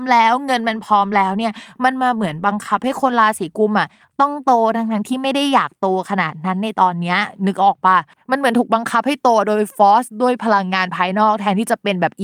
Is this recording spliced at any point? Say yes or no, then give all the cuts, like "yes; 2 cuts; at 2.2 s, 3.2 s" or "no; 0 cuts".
no; 0 cuts